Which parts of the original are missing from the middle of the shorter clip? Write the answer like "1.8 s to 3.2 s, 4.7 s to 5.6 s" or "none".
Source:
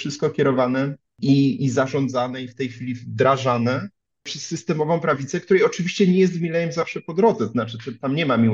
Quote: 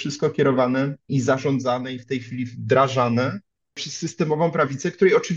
1.1 s to 1.6 s